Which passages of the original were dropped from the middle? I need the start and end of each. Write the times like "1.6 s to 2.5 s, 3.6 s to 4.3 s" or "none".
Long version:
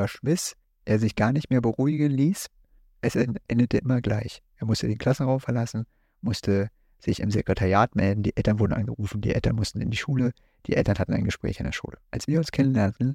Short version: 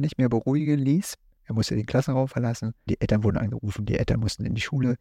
2.7 s to 4.5 s, 6.0 s to 8.2 s